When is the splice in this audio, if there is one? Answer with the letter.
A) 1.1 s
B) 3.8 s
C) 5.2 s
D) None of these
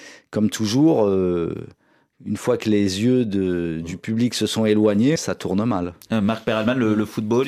C